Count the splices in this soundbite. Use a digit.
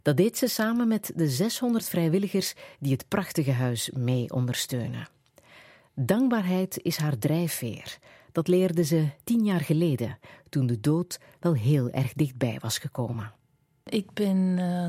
0